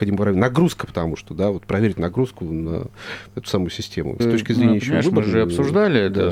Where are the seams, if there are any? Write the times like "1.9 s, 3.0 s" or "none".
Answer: 4.2 s

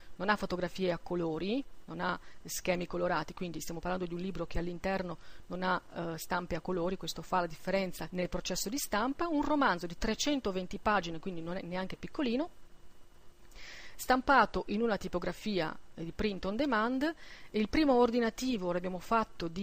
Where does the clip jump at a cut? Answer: 8.1 s

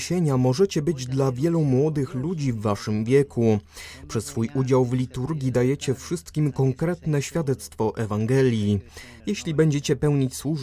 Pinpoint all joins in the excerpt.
none

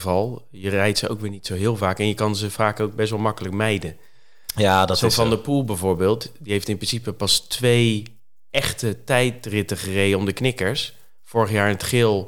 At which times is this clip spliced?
none

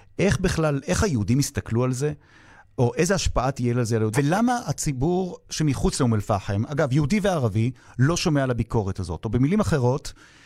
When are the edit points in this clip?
4.1 s

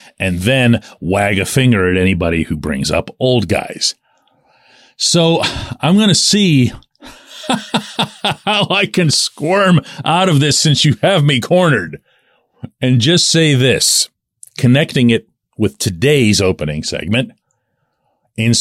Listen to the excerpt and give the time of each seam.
none

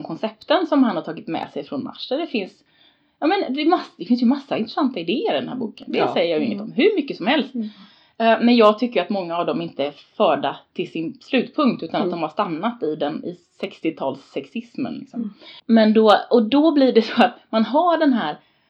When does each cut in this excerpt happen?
15.6 s

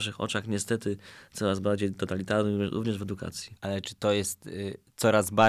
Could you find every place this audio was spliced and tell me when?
none

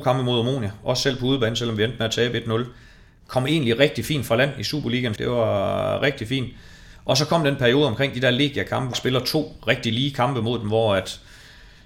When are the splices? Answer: 5.2 s, 8.9 s

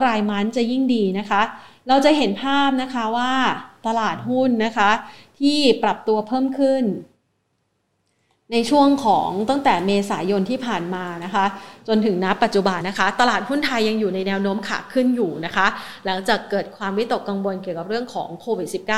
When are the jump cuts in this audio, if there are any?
12.8 s

